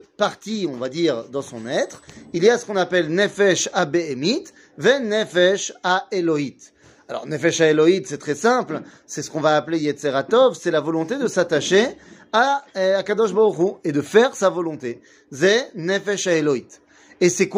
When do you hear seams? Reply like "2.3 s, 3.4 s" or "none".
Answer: none

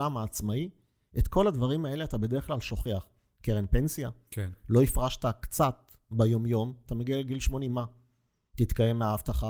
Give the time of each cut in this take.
4.3 s

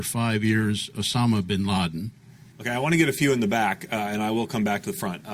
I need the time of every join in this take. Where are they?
2.5 s

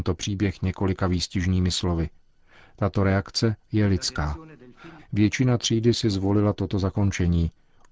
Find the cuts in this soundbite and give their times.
3.6 s, 5.0 s

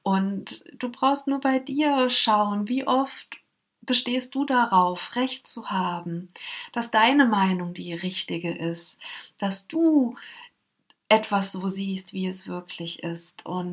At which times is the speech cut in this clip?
none

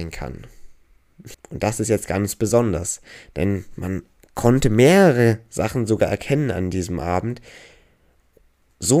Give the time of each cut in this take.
1.3 s

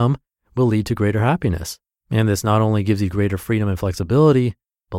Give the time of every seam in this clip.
2.0 s

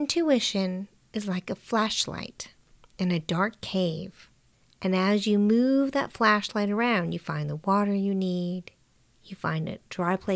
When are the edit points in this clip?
none

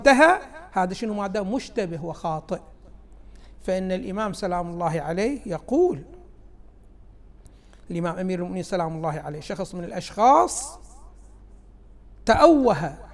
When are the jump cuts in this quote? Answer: none

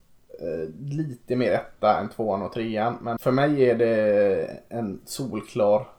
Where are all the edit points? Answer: 3.2 s

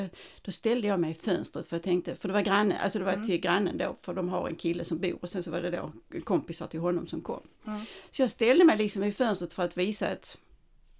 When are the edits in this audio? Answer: none

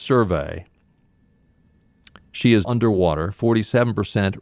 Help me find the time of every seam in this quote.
2.6 s

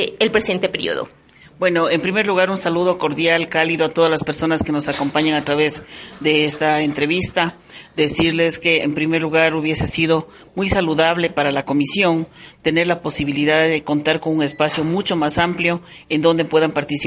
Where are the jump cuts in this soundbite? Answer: none

